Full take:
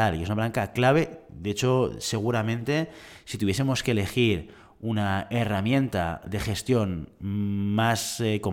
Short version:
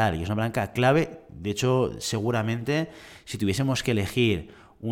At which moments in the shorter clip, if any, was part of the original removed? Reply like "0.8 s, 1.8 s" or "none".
none